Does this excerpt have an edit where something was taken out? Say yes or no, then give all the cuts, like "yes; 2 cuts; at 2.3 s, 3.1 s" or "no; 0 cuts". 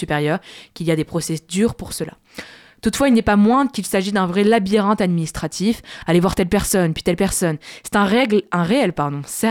no; 0 cuts